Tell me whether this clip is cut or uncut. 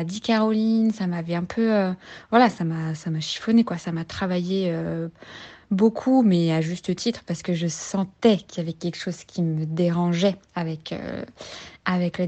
uncut